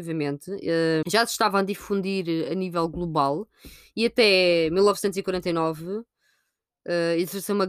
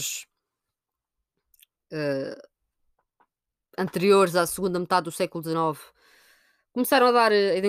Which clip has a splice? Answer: first; 1 cut; at 1.0 s

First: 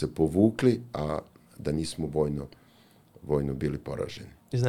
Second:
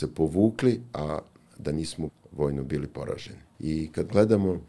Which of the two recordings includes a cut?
second; 2 cuts; at 2.1 s, 3.5 s

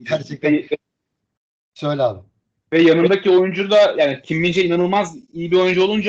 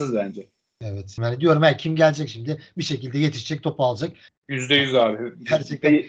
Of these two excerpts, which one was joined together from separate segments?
second; 2 cuts; at 1.2 s, 4.3 s

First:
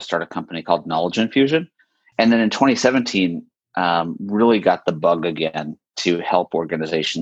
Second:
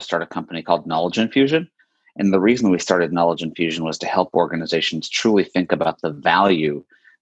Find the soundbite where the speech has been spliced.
first; 1 cut; at 2.1 s

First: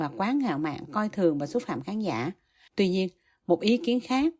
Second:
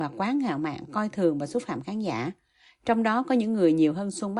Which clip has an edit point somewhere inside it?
first; 1 cut; at 2.7 s

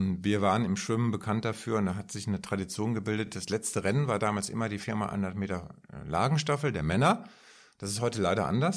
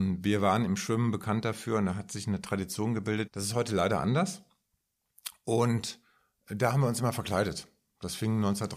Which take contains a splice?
second; 1 cut; at 3.3 s

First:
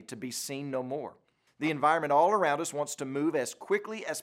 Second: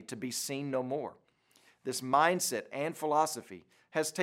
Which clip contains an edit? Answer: first; 1 cut; at 1.5 s

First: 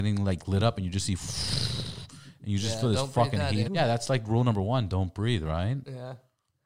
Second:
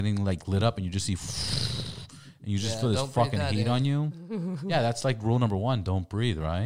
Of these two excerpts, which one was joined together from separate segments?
first; 1 cut; at 3.6 s

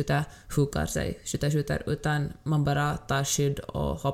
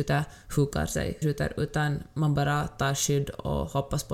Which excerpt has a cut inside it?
second; 1 cut; at 1.2 s

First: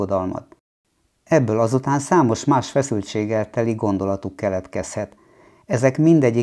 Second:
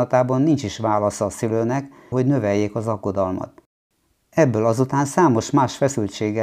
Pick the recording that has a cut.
second; 1 cut; at 2.1 s

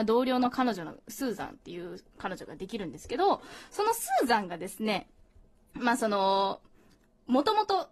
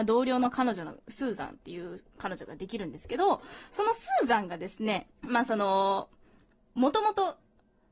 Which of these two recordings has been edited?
second; 1 cut; at 5.1 s

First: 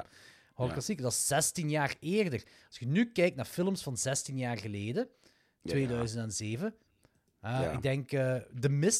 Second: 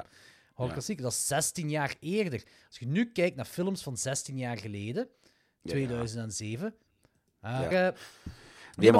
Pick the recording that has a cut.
second; 1 cut; at 7.7 s

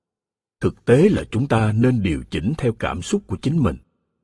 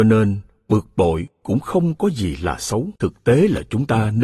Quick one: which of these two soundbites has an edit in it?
second; 1 cut; at 3.0 s

